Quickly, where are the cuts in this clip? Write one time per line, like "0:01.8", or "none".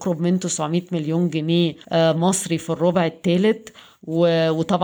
0:01.8